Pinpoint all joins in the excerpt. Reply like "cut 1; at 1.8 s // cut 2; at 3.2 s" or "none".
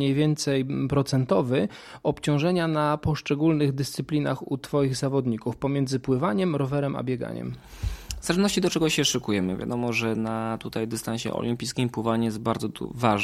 none

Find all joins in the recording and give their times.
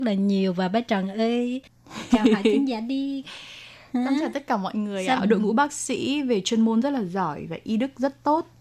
cut 1; at 5.2 s

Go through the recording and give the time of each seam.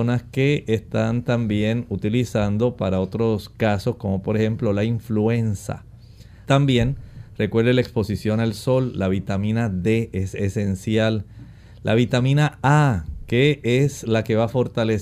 cut 1; at 6.5 s

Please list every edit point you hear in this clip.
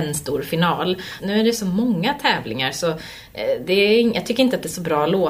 cut 1; at 1.2 s

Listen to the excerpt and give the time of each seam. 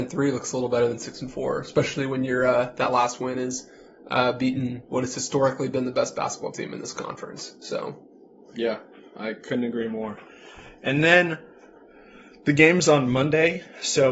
none

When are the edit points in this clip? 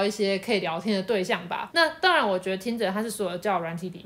cut 1; at 1.7 s

